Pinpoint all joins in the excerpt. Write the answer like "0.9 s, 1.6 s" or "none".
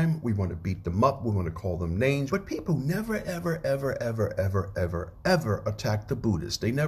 2.3 s